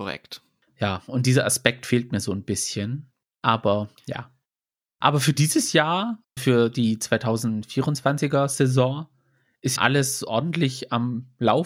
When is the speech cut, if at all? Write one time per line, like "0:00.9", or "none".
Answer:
0:06.4
0:09.8

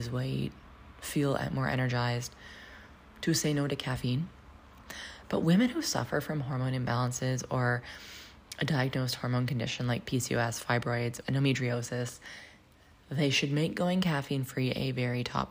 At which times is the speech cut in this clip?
0:11.2

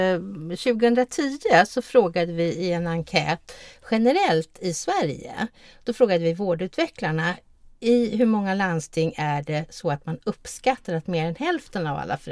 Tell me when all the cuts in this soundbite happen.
none

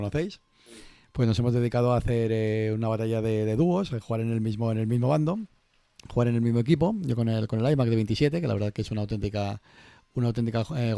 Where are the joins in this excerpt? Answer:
none

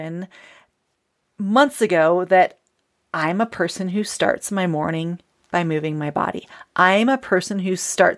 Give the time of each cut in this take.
none

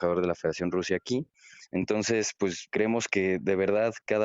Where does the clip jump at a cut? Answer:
0:01.7
0:02.7

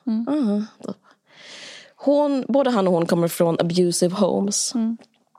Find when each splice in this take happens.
none

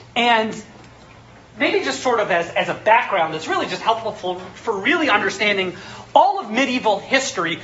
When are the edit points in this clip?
none

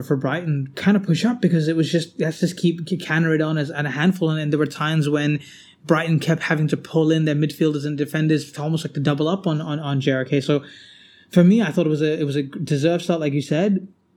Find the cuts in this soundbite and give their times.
none

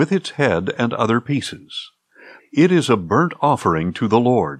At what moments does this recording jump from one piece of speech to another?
0:02.4

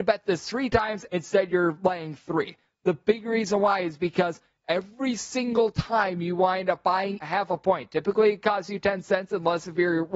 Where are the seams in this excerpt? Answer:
0:01.1
0:07.2

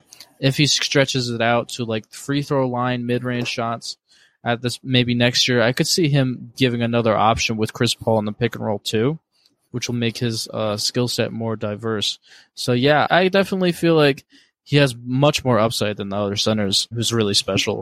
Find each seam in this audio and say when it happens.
0:13.1
0:16.9

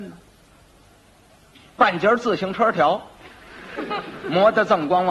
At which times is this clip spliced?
none

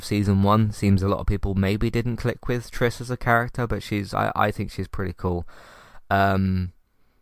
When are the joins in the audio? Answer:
none

